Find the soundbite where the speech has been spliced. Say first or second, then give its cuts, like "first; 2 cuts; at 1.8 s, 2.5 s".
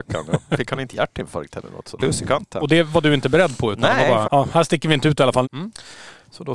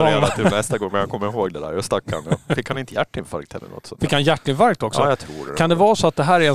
first; 3 cuts; at 2.0 s, 4.2 s, 5.4 s